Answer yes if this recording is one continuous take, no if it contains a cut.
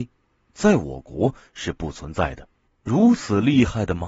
no